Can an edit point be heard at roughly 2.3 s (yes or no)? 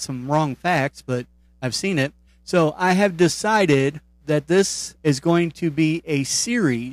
yes